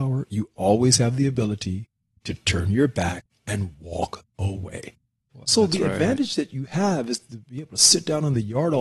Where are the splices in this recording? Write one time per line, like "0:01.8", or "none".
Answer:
0:05.4